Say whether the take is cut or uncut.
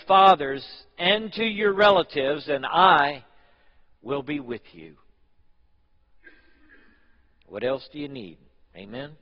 uncut